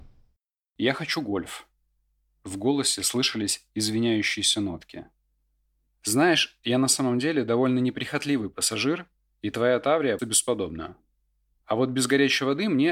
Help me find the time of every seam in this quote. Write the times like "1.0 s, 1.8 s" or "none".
10.2 s